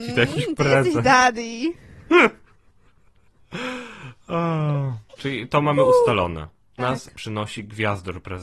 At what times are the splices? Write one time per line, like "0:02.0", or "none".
0:05.2
0:06.8